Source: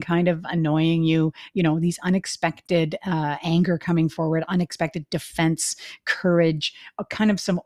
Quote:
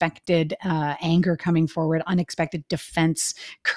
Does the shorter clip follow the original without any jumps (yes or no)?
yes